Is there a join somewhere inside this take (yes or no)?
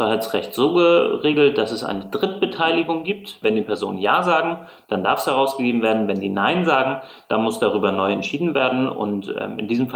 yes